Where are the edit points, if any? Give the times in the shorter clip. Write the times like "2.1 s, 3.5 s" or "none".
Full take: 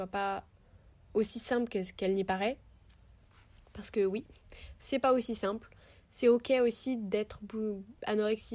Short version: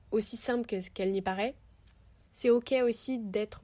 2.2 s